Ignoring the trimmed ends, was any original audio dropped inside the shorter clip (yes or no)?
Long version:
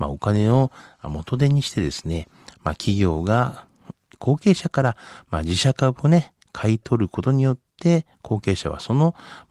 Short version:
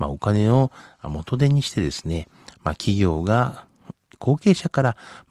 no